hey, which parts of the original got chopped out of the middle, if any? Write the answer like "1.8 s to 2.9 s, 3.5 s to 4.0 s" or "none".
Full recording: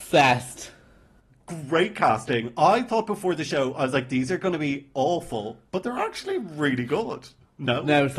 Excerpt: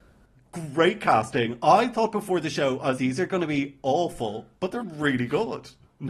3.9 s to 4.1 s, 5.9 s to 6.4 s